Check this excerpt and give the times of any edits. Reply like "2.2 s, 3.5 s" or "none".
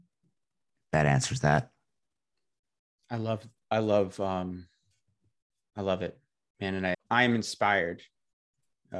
6.9 s